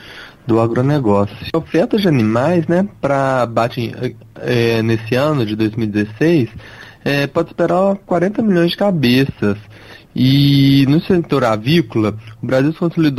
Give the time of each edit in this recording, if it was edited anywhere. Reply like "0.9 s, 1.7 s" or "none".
none